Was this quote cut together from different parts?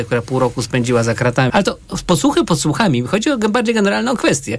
yes; 1 cut; at 1.5 s

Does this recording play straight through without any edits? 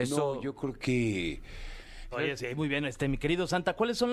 no; 1 cut; at 2.1 s

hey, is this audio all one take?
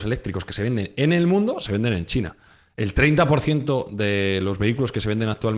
yes; 0 cuts

